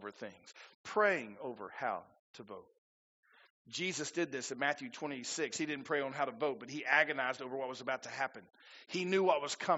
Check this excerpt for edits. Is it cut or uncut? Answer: uncut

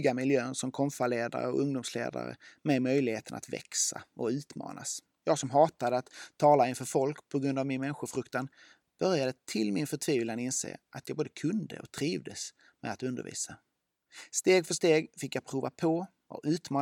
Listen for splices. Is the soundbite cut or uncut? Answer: uncut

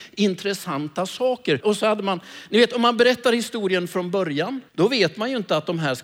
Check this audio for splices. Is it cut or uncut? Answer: cut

